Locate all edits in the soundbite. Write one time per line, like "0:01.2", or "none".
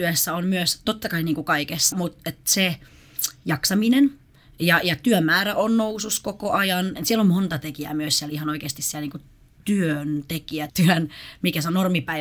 0:01.9
0:07.0
0:10.7